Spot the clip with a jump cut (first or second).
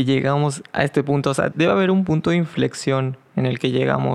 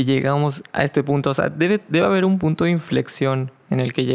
first